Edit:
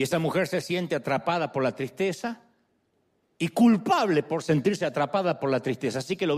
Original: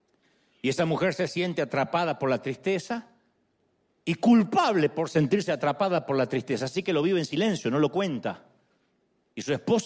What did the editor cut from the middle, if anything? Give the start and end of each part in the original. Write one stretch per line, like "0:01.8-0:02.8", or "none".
none